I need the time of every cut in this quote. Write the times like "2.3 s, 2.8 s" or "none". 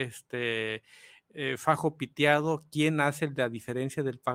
none